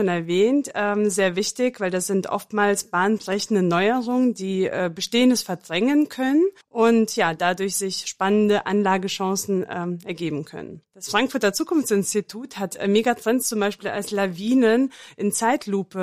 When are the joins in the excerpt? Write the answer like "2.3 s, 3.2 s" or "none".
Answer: 6.6 s